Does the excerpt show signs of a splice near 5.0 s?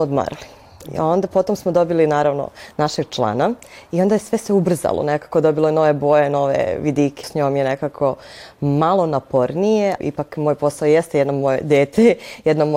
no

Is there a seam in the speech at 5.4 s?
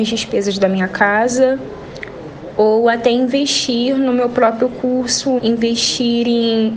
yes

